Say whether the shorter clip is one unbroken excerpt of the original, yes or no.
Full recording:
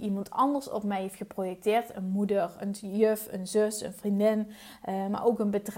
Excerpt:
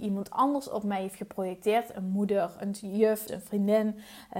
no